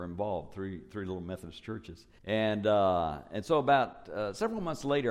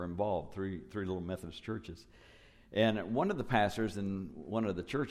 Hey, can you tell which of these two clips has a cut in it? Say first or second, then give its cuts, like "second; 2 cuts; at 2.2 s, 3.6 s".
first; 1 cut; at 2.2 s